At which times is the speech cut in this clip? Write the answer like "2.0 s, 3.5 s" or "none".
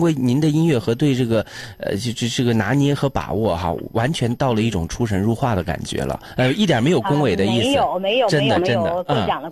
none